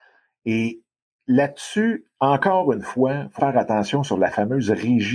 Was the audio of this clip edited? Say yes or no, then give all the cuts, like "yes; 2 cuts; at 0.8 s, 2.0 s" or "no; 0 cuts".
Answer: yes; 1 cut; at 3.4 s